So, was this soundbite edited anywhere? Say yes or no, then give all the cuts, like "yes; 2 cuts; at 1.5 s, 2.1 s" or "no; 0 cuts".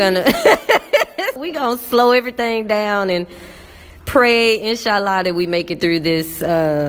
yes; 1 cut; at 1.4 s